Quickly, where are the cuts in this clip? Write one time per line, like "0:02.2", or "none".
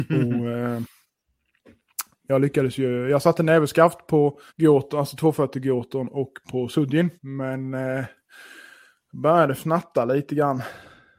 0:04.5
0:07.2